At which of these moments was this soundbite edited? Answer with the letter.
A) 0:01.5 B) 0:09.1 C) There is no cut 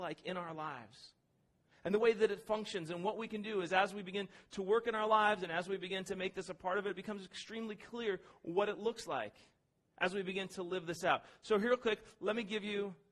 C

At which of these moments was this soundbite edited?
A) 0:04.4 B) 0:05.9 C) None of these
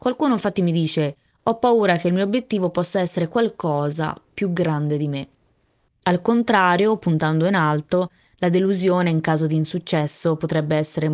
B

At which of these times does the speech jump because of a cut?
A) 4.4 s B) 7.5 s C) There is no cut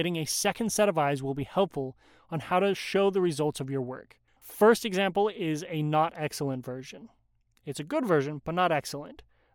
A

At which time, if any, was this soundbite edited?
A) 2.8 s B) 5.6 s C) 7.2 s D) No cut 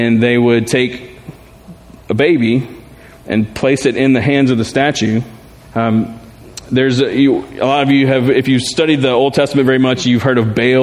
B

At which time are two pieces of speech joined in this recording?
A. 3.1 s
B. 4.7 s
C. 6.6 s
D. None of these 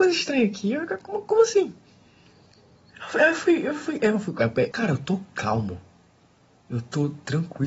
B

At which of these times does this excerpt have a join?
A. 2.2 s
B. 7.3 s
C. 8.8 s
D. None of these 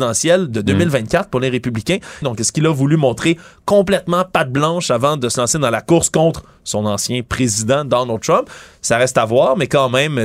A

